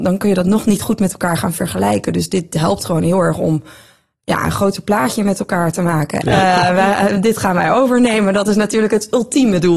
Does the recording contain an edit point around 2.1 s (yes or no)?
no